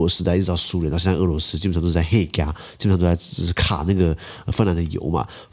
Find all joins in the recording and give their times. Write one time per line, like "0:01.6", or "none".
none